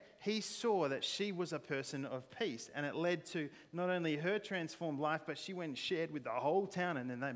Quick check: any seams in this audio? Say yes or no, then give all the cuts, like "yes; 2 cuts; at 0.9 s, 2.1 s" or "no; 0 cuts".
no; 0 cuts